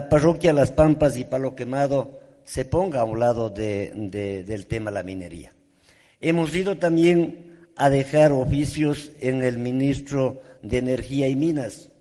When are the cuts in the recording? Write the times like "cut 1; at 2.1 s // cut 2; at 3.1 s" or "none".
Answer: none